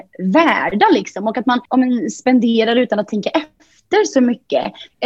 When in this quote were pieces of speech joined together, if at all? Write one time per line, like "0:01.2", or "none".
0:01.7

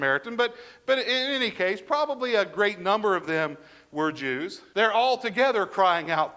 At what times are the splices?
0:04.7

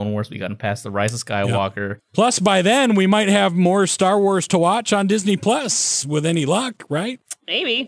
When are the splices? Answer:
0:02.0

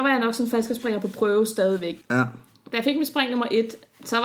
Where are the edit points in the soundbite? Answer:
0:02.0

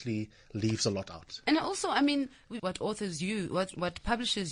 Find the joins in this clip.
0:01.4
0:02.6

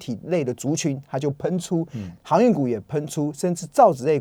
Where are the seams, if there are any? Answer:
none

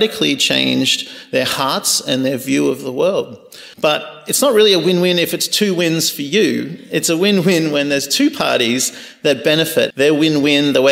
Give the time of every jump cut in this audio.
0:03.7
0:09.9

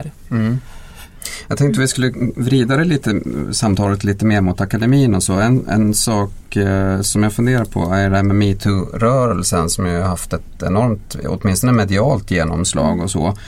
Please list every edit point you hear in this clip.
none

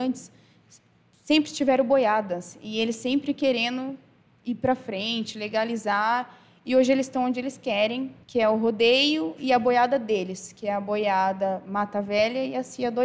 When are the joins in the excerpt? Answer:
0:08.2

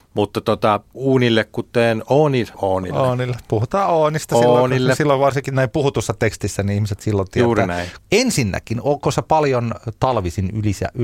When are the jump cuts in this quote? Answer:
0:02.5
0:08.0

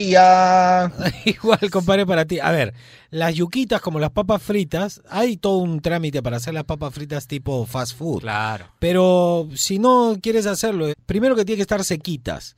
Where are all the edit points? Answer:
0:10.9

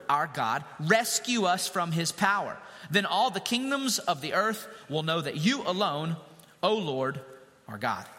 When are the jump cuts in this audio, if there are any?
none

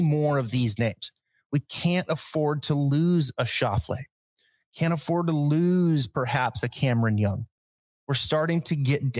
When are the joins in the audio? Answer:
none

